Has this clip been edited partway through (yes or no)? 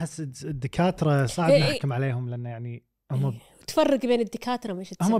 no